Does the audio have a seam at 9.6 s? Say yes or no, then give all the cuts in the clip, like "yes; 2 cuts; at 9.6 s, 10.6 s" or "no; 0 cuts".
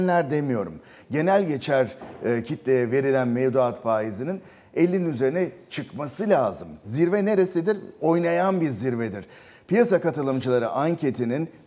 no; 1 cut; at 6.8 s